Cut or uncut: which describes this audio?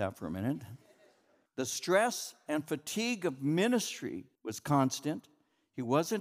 cut